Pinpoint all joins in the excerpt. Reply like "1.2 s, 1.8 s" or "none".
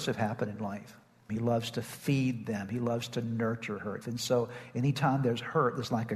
1.3 s, 4.0 s